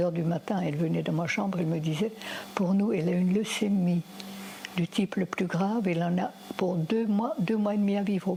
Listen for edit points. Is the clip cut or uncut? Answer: uncut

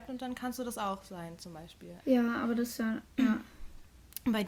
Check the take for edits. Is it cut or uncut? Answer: cut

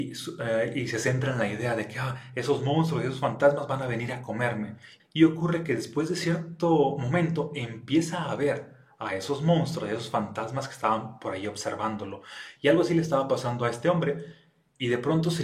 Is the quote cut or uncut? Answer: cut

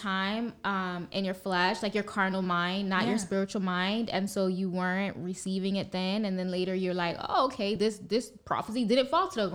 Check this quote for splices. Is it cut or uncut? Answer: uncut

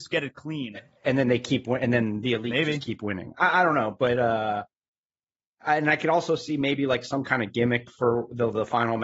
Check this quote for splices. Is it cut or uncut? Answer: uncut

